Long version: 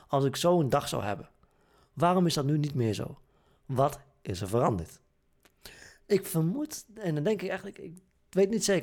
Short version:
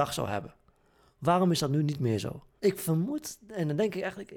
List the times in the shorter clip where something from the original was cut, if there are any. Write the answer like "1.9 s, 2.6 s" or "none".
2.6 s